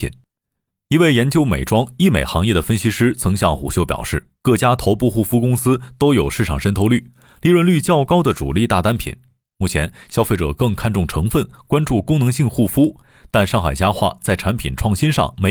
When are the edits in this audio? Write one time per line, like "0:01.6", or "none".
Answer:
none